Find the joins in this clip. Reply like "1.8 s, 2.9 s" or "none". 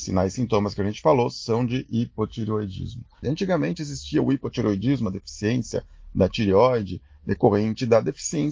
3.2 s